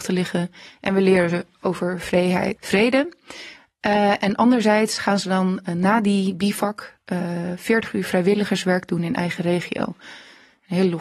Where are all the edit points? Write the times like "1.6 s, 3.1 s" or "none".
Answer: 2.5 s